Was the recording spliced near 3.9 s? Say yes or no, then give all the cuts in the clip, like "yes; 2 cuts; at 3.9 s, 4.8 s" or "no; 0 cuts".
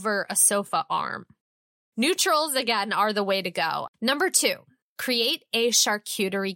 yes; 1 cut; at 3.9 s